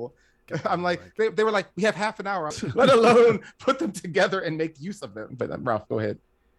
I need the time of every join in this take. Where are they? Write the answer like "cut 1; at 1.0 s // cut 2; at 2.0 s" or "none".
cut 1; at 2.5 s // cut 2; at 5.3 s